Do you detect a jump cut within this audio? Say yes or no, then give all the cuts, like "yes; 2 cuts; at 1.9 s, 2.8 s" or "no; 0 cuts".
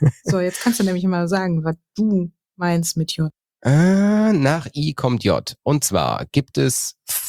no; 0 cuts